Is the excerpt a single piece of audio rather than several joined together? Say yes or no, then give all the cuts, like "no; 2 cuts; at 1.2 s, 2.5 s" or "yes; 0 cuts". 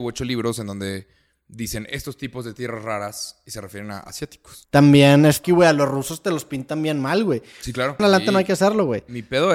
no; 2 cuts; at 5.4 s, 8.0 s